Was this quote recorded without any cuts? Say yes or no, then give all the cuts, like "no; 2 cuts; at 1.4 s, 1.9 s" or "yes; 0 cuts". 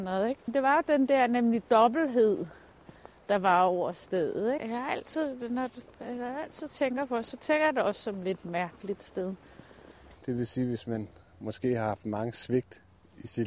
no; 2 cuts; at 4.6 s, 10.2 s